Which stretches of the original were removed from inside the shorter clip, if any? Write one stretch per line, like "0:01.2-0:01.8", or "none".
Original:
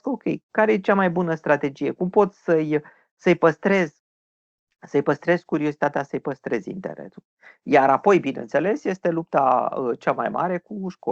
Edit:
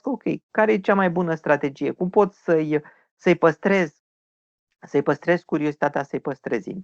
none